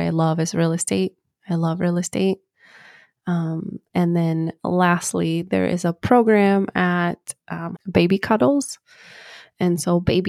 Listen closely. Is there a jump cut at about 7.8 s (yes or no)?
yes